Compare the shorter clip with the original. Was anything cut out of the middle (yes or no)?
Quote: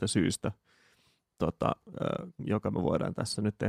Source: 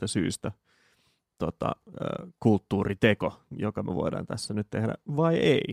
yes